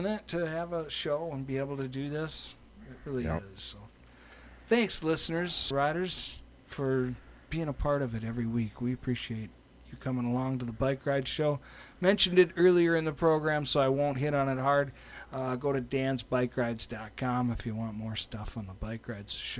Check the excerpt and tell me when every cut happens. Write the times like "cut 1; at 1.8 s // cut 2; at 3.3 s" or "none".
cut 1; at 5.7 s